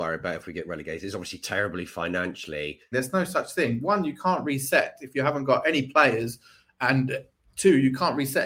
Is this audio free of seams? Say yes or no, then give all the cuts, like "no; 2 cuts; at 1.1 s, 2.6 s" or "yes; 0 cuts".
no; 1 cut; at 2.9 s